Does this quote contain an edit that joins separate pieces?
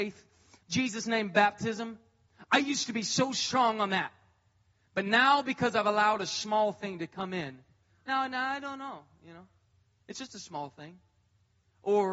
no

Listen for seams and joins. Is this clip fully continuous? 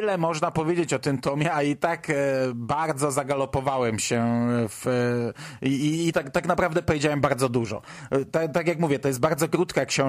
no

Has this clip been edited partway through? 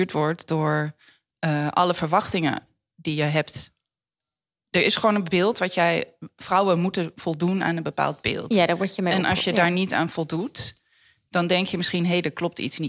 no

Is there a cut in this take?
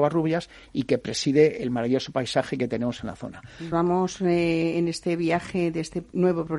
yes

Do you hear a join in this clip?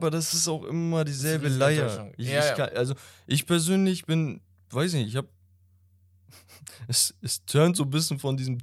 no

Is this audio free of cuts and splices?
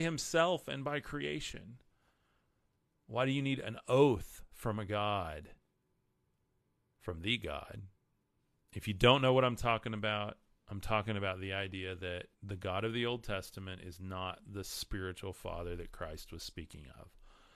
no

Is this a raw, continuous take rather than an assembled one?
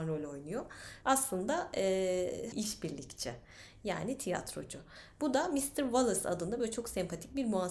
no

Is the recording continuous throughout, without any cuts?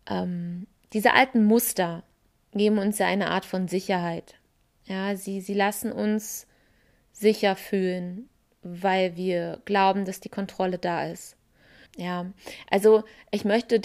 no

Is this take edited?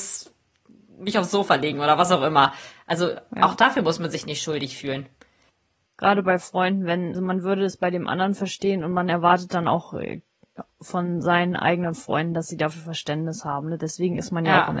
yes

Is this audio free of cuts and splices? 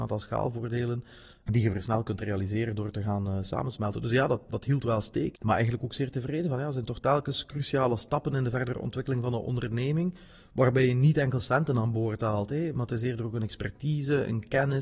no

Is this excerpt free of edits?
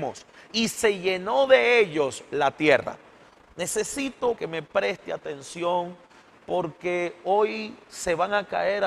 no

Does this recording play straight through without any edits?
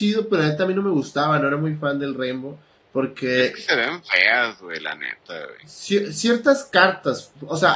yes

